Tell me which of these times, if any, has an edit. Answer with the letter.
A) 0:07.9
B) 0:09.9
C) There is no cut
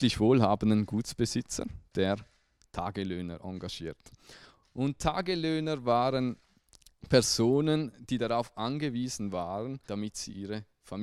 B